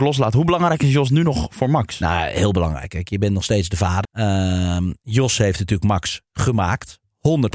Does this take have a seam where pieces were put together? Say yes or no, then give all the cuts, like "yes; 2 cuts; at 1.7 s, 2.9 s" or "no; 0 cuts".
yes; 1 cut; at 4.0 s